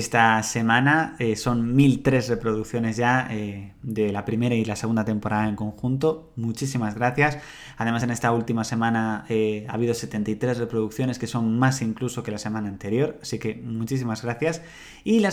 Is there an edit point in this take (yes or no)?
no